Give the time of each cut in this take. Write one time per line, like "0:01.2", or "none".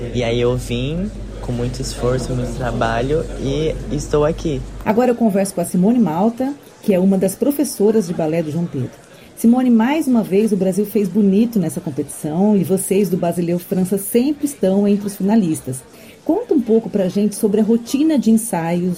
none